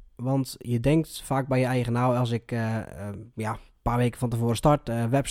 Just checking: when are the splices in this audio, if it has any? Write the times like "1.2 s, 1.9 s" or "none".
none